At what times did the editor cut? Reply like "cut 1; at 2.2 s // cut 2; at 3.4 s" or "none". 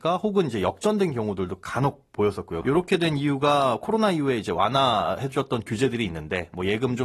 cut 1; at 2.6 s